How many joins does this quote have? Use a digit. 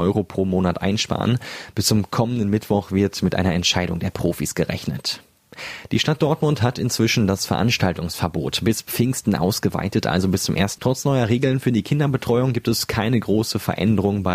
1